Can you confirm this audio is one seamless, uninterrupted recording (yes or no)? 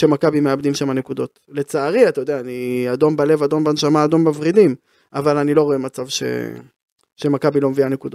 yes